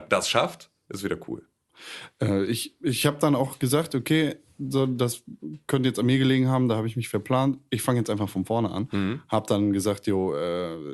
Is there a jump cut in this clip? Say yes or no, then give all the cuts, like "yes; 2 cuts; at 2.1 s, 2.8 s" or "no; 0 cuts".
no; 0 cuts